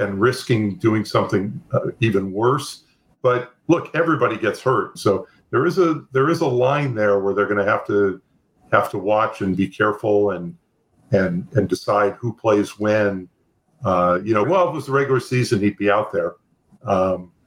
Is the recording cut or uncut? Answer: cut